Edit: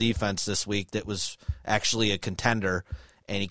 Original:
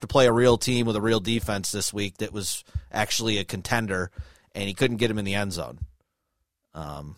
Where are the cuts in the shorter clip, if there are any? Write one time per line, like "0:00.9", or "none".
none